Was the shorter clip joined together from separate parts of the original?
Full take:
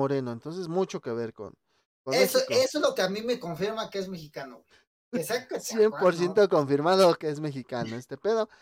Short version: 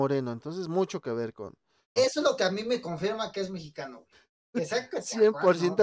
yes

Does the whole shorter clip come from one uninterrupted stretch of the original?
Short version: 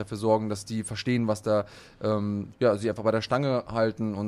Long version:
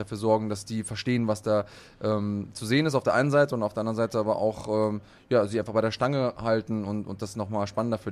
no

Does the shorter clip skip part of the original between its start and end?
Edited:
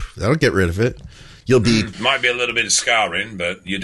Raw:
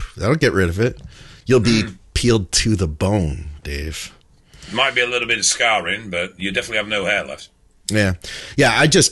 yes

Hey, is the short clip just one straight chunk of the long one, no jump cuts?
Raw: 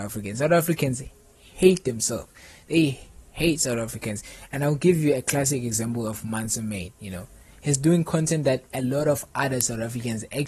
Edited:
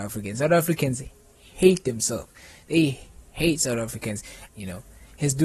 no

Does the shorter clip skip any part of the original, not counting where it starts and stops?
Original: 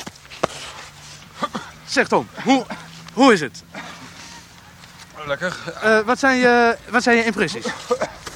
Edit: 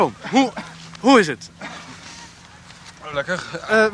no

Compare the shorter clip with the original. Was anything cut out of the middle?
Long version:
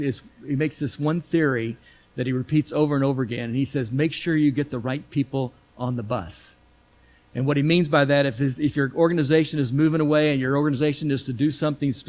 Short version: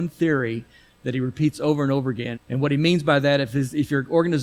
yes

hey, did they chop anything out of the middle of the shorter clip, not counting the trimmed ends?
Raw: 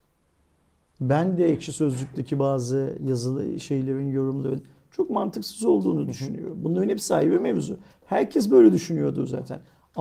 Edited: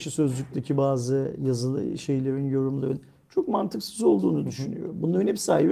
no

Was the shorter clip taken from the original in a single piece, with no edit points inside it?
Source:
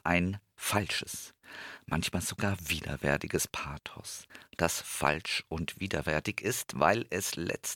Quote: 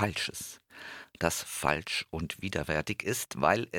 no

